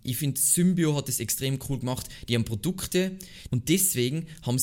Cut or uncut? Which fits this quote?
cut